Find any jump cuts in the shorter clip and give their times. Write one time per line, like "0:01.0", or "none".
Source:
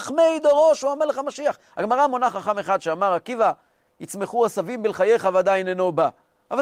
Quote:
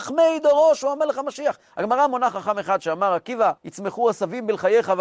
0:03.6